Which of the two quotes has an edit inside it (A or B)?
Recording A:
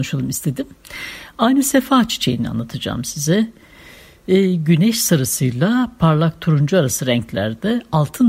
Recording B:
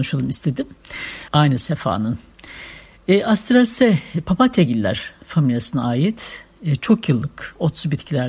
B